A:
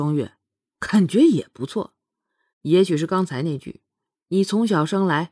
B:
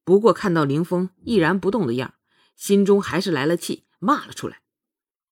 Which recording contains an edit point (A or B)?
A